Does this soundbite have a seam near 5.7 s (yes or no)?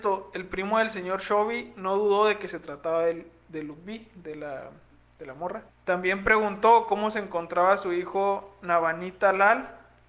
yes